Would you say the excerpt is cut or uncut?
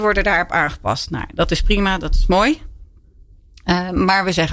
uncut